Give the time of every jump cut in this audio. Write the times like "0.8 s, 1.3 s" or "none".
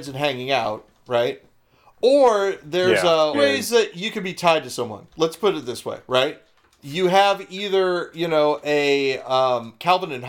3.3 s